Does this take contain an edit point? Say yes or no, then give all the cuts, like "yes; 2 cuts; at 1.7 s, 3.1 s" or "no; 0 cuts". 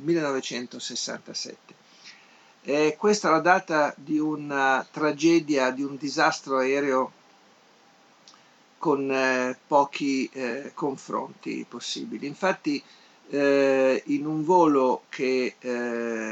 no; 0 cuts